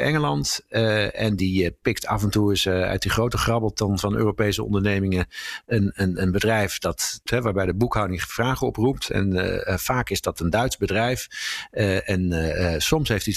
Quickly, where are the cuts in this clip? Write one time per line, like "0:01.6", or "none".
0:07.3